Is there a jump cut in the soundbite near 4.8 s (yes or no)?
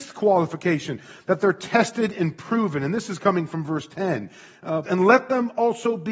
yes